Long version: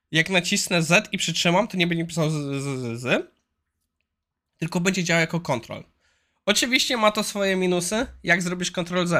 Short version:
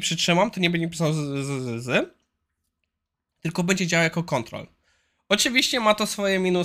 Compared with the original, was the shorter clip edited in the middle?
no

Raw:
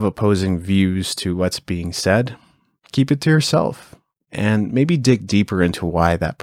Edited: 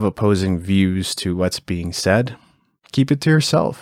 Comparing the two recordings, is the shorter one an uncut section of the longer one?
yes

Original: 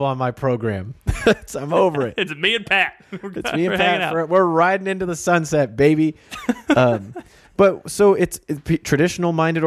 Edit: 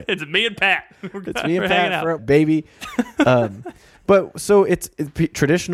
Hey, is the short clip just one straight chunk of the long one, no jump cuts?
no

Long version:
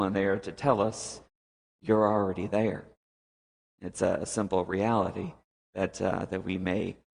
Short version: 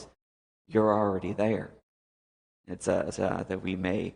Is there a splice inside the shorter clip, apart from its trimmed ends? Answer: yes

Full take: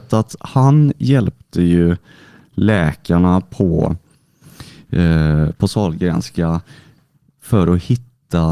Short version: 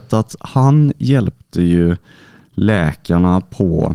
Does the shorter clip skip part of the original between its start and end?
no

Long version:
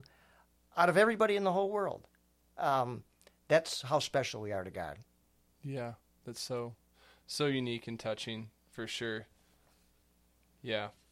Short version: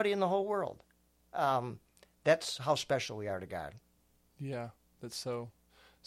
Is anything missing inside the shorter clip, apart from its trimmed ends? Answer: no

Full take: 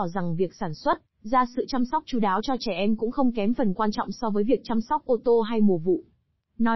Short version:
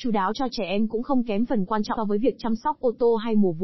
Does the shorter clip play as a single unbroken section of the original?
no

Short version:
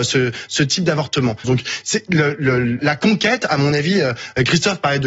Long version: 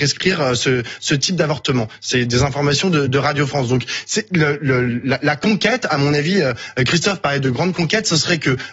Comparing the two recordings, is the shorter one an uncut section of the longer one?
no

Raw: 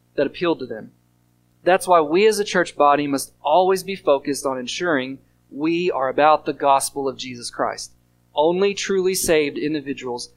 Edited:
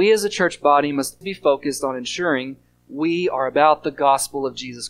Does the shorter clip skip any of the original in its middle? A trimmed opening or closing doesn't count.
yes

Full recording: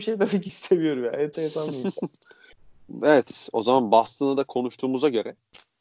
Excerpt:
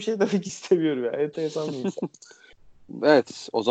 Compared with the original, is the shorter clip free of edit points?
yes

